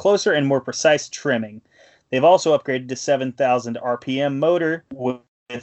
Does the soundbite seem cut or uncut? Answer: uncut